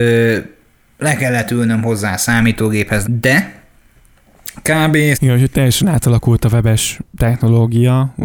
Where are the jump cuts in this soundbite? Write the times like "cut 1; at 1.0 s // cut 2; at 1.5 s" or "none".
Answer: cut 1; at 3.0 s // cut 2; at 5.1 s